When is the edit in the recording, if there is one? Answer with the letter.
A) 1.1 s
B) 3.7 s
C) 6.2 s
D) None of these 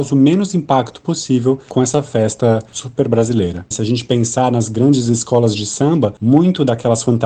B